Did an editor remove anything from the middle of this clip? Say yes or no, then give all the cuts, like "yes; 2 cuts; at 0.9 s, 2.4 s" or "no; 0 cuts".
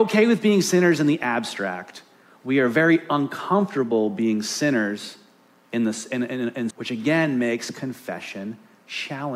yes; 1 cut; at 6.7 s